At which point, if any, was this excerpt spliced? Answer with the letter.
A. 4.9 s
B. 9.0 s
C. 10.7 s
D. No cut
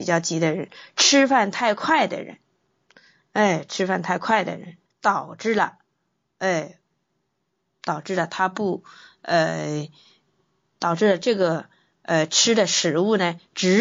A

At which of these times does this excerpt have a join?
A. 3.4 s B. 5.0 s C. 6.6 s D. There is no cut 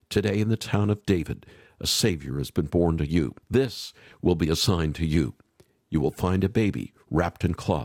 A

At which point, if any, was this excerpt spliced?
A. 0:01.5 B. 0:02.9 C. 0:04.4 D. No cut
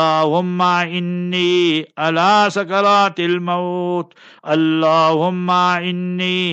C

